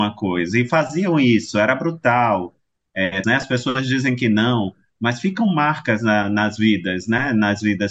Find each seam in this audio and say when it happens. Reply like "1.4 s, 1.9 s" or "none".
3.2 s